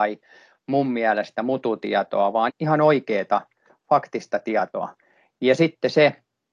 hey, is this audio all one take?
no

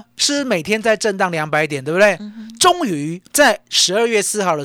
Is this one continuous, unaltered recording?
no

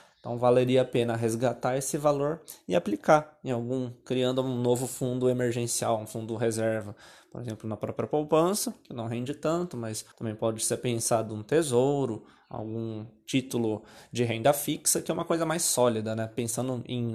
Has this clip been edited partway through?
yes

